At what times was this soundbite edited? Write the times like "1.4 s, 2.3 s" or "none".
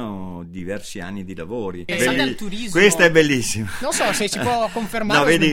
1.9 s